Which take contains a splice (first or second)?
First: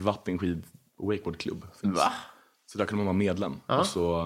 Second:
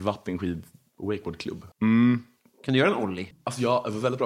second